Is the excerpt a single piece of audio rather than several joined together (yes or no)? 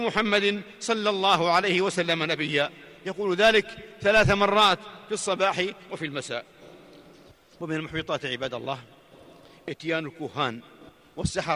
yes